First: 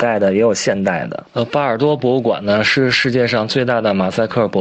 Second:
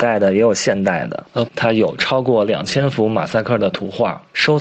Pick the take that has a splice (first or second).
second